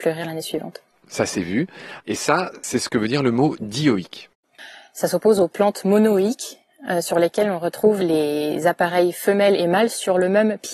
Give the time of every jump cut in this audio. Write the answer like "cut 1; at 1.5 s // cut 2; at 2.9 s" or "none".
cut 1; at 2.0 s